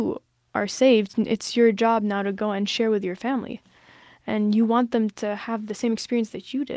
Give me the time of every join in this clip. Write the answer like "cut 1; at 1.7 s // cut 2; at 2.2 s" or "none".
none

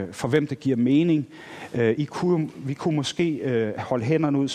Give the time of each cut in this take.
none

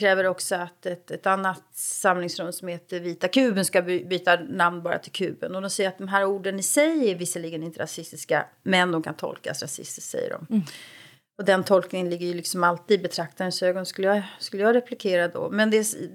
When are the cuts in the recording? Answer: none

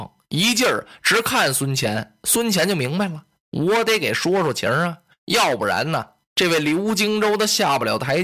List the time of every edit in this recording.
none

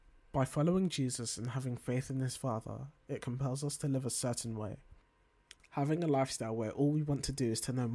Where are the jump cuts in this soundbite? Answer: cut 1; at 5.6 s

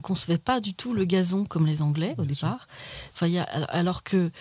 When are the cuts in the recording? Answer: cut 1; at 3.1 s

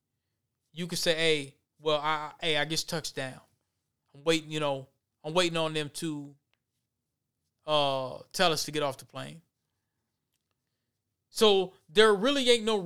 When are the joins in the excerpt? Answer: none

